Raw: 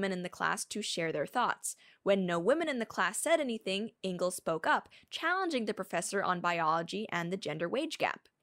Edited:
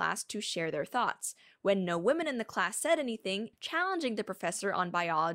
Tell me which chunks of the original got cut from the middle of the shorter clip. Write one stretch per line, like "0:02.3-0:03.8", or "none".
0:03.9-0:05.0